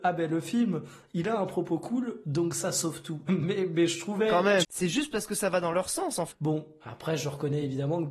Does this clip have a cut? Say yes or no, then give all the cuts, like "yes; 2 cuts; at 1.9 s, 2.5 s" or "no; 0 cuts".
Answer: yes; 3 cuts; at 3.3 s, 4.6 s, 6.3 s